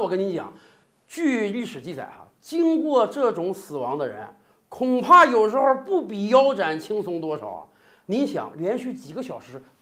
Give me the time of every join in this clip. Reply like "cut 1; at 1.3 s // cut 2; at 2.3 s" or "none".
none